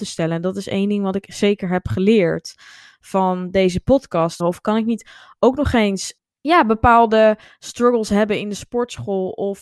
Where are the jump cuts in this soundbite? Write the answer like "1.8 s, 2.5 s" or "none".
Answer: 4.4 s, 6.3 s